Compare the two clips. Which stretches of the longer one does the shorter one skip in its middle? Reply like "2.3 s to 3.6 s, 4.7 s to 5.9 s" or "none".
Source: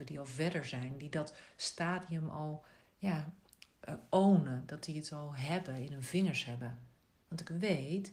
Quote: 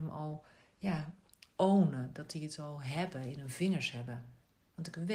3.8 s to 4.1 s

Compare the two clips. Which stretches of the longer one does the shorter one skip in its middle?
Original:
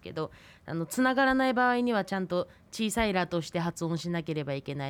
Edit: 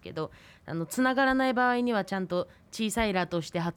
none

